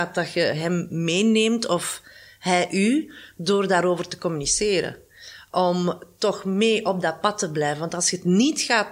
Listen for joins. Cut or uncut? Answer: uncut